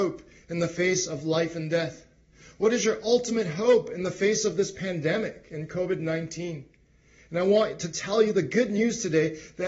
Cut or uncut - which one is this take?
uncut